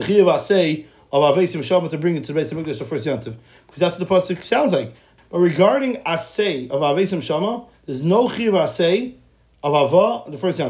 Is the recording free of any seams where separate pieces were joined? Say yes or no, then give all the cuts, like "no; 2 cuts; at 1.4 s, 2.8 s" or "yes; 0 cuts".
no; 2 cuts; at 5.2 s, 7.7 s